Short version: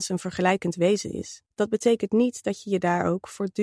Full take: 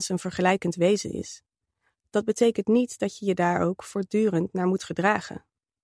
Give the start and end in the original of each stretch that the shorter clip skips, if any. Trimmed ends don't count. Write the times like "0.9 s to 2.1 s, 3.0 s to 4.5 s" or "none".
1.5 s to 2.1 s